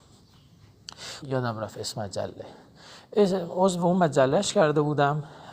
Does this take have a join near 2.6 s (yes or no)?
no